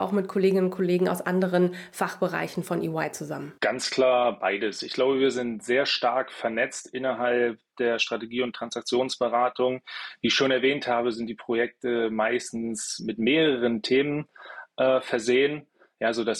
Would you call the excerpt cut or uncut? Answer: cut